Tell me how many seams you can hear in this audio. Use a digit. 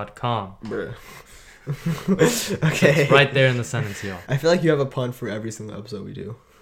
1